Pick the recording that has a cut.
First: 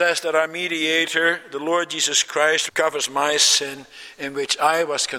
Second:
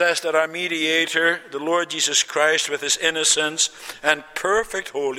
first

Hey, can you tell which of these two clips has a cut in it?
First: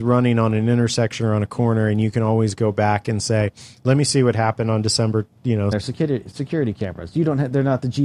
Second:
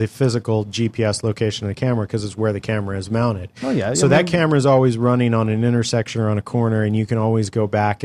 first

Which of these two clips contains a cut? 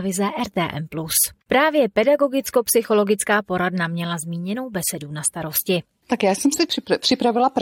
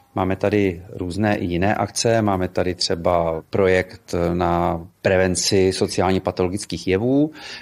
first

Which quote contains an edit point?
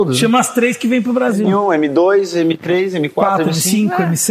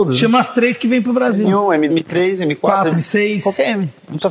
second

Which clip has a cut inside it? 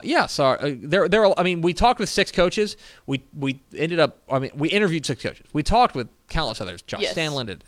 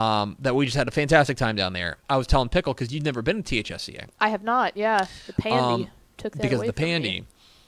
second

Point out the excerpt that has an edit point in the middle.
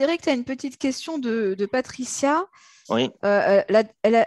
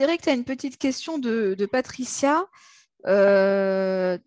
first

